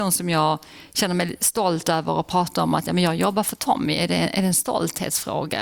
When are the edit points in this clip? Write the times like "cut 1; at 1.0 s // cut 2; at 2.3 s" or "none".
none

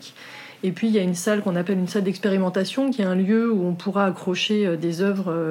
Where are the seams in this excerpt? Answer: none

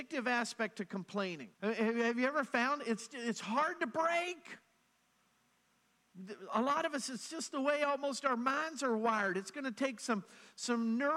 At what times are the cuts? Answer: cut 1; at 1.5 s

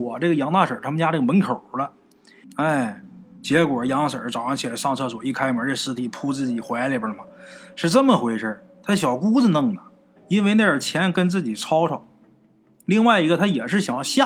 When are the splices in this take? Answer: cut 1; at 2.4 s // cut 2; at 10.2 s

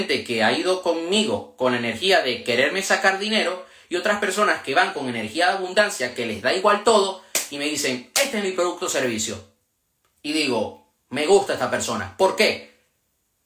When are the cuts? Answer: none

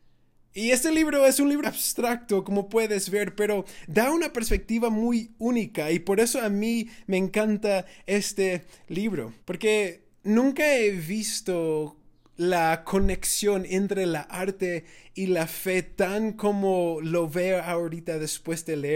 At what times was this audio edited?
cut 1; at 1.6 s // cut 2; at 9.4 s

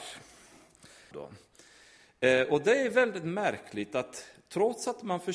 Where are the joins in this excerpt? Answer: cut 1; at 1.1 s

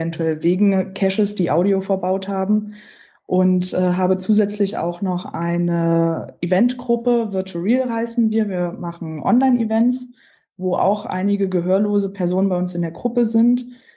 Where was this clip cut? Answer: none

